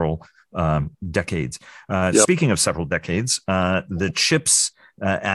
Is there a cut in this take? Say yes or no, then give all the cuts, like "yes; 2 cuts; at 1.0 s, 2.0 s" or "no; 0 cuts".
no; 0 cuts